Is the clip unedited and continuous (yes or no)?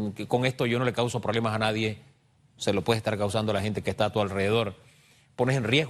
no